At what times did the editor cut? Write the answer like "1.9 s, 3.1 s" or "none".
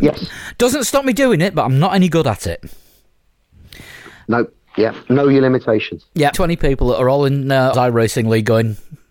6.3 s, 7.7 s